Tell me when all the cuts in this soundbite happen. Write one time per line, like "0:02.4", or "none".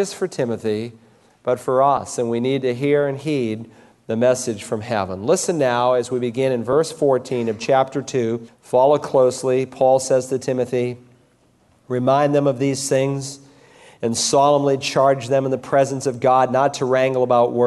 0:08.5